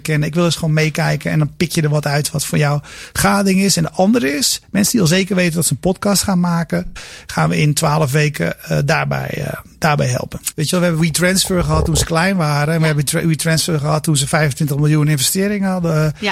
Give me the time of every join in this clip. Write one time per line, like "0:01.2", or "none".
0:10.5